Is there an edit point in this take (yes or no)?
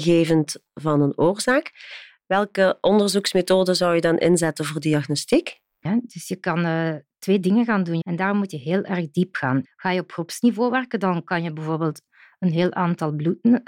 yes